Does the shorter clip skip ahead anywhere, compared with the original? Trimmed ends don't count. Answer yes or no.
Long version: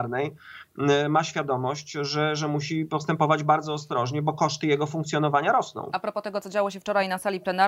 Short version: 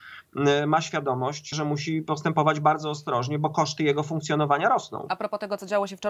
yes